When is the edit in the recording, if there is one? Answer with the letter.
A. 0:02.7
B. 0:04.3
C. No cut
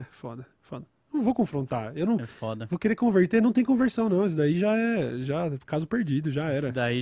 C